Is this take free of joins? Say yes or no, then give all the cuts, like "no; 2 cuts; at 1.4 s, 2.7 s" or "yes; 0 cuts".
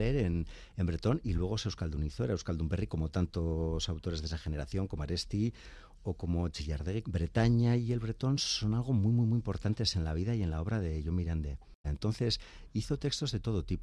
no; 2 cuts; at 7.0 s, 11.8 s